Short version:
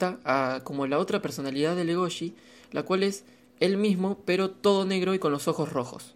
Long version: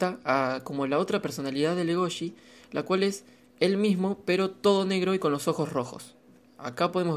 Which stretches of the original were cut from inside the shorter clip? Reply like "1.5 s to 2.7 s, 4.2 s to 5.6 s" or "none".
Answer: none